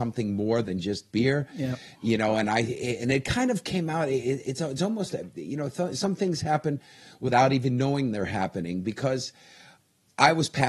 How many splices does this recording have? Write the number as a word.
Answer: zero